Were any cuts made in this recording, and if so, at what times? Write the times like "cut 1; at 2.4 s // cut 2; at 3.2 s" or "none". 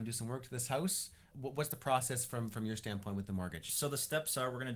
cut 1; at 1.3 s

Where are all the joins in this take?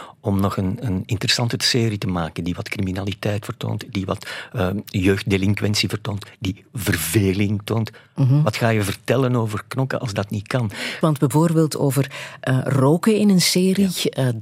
cut 1; at 11.0 s

